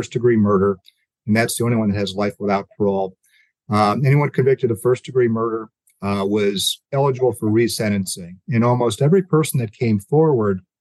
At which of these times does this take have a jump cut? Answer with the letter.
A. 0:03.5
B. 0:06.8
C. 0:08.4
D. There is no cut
B